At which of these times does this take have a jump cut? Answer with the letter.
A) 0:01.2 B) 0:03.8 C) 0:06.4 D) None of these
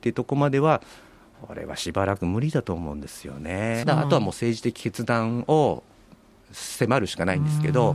B